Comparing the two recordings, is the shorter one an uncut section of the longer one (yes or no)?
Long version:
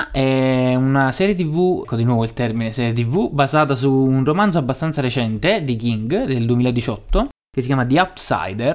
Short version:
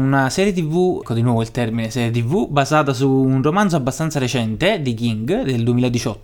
yes